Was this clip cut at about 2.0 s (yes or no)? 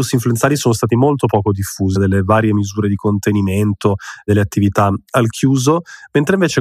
yes